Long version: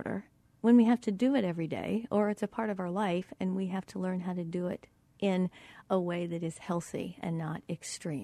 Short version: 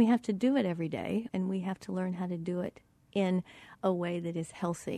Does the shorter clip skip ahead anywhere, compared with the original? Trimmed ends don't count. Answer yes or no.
yes